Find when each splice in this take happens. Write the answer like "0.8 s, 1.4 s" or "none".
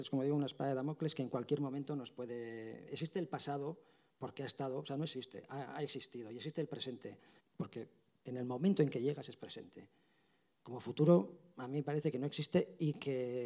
7.4 s

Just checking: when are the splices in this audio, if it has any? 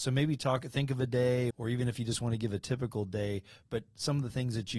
1.5 s

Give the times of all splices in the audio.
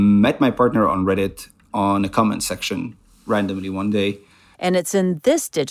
4.5 s

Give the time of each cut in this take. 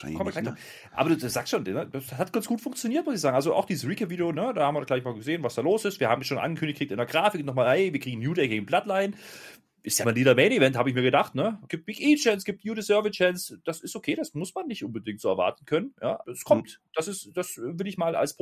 10.0 s, 11.7 s, 16.2 s

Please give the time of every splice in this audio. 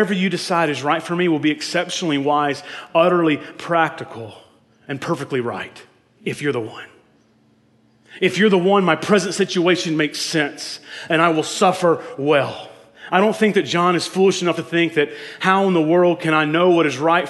none

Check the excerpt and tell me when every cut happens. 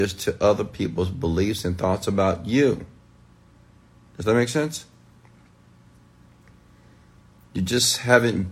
none

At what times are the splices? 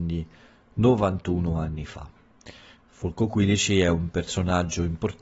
none

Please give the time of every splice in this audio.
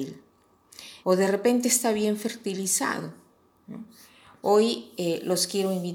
1.0 s

